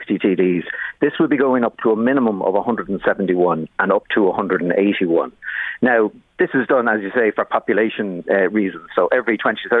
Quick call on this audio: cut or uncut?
uncut